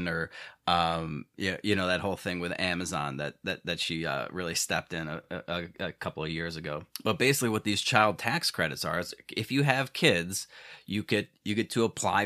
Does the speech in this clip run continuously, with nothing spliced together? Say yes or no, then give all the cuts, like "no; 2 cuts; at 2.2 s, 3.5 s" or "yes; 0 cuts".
yes; 0 cuts